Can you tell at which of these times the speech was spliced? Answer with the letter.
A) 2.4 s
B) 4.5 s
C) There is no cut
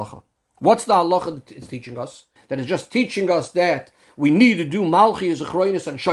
A